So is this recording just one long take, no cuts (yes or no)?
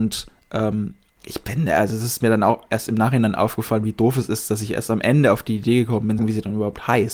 no